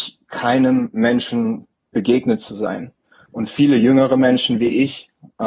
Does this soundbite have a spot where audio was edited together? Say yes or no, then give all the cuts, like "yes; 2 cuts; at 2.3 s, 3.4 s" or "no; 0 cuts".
yes; 1 cut; at 3.3 s